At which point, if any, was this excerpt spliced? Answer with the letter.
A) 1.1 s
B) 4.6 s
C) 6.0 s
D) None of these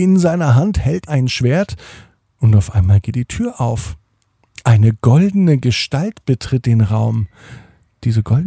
A